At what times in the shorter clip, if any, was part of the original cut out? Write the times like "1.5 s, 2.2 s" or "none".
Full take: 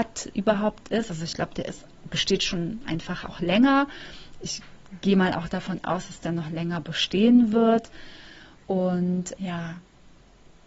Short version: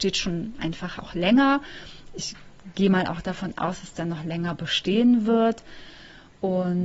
none